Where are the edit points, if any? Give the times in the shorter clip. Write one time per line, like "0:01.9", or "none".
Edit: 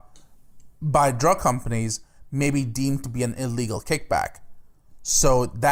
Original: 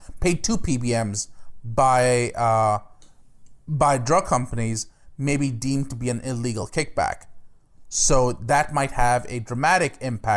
none